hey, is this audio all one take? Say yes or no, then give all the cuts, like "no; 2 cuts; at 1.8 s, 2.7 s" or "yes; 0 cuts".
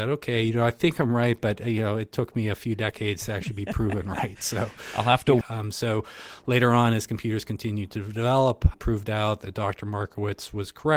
no; 2 cuts; at 5.4 s, 8.7 s